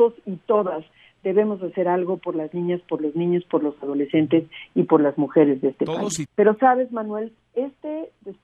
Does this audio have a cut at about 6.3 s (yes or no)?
yes